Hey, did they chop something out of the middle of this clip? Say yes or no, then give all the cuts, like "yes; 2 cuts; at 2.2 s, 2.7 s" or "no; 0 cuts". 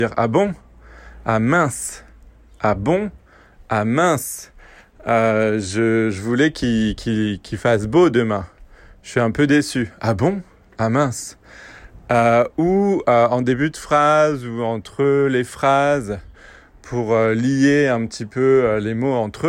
no; 0 cuts